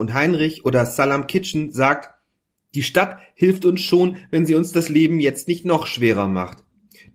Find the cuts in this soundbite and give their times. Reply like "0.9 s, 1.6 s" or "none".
none